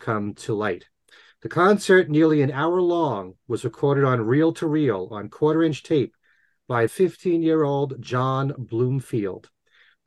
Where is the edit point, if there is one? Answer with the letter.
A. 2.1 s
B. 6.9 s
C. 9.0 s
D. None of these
B